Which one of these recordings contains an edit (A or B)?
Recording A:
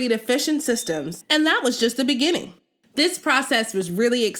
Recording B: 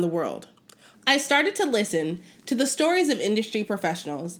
B